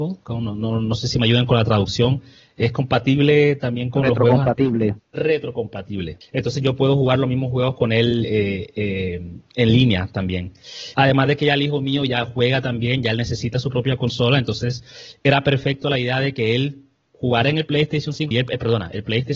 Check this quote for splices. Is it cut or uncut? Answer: cut